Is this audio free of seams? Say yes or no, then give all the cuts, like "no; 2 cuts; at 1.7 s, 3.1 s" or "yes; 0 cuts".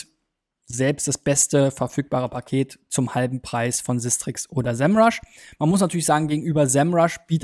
yes; 0 cuts